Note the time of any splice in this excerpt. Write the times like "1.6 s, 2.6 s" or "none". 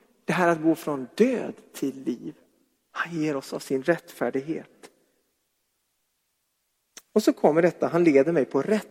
none